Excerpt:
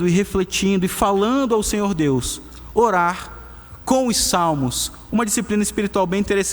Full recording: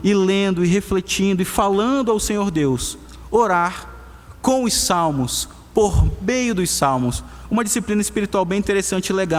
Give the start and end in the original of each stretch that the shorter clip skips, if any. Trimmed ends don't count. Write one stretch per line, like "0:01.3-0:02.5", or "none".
0:05.7-0:07.5